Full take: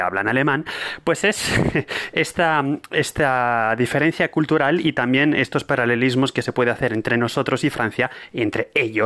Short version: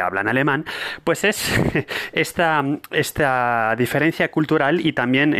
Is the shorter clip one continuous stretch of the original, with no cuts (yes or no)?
yes